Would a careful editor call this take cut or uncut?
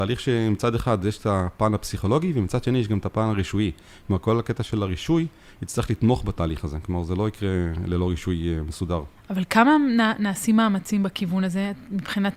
cut